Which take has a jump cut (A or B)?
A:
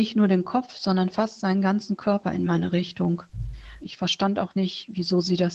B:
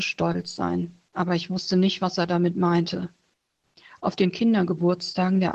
A